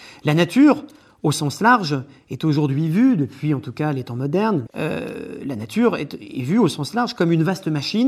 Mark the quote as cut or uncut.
cut